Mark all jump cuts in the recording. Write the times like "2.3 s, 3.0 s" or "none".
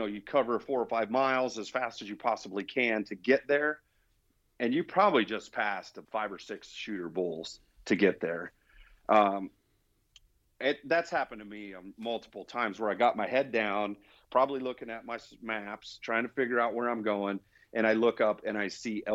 6.0 s